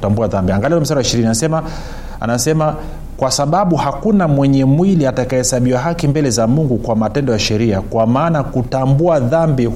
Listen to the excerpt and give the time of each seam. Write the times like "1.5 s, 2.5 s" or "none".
2.2 s